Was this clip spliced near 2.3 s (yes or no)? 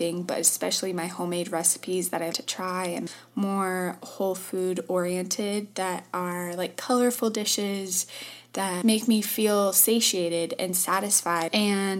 yes